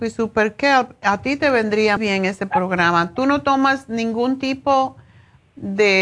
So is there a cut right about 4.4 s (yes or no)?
no